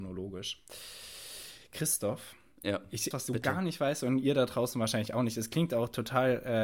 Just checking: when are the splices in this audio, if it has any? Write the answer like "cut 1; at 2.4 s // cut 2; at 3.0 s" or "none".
cut 1; at 3.1 s